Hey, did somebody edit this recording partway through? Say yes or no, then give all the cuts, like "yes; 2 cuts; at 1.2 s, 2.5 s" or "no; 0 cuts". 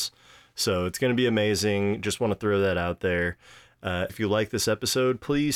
yes; 1 cut; at 4.1 s